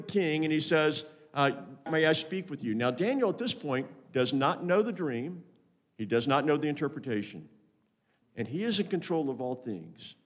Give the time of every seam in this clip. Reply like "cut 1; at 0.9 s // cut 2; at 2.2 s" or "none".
cut 1; at 1.9 s // cut 2; at 8.2 s